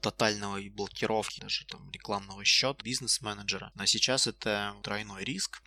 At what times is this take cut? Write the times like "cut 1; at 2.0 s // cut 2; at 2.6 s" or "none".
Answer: cut 1; at 2.8 s